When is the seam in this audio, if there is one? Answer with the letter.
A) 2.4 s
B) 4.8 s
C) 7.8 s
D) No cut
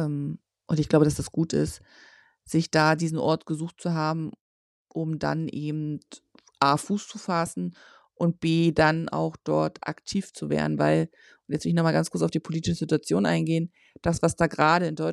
D